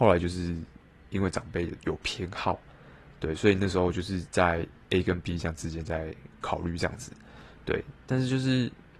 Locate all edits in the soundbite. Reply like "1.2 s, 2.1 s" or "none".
none